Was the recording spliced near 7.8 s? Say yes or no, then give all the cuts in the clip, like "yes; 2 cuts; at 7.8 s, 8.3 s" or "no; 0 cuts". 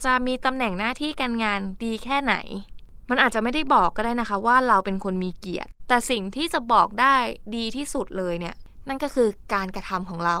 no; 1 cut; at 5.8 s